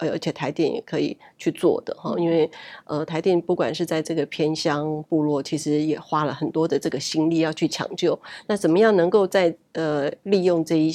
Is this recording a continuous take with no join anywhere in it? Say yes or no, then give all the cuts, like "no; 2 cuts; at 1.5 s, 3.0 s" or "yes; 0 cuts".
yes; 0 cuts